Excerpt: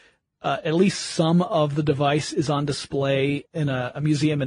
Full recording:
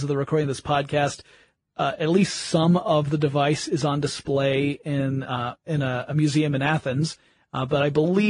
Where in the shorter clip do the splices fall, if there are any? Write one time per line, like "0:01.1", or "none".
0:03.5